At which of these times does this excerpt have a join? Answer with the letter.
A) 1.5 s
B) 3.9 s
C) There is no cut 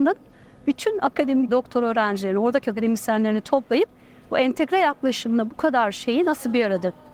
A